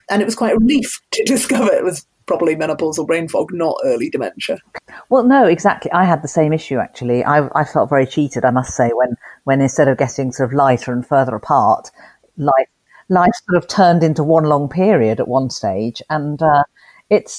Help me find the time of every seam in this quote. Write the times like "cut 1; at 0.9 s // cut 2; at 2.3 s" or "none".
none